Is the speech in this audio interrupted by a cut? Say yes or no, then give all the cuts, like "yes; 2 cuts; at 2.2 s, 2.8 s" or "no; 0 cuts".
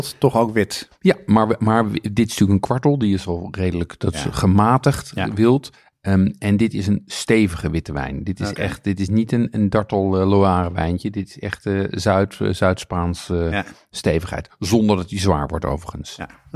no; 0 cuts